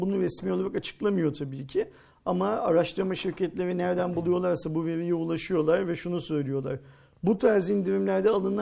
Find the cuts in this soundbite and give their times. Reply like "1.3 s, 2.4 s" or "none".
none